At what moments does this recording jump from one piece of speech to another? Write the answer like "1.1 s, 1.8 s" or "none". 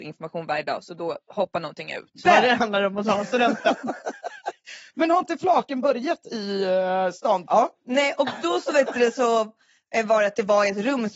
2.2 s, 7.5 s